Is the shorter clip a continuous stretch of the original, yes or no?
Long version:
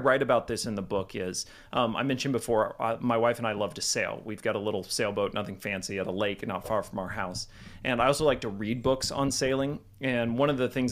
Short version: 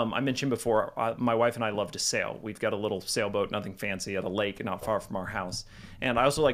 yes